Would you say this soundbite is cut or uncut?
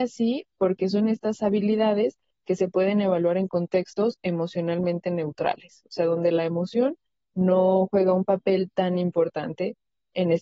uncut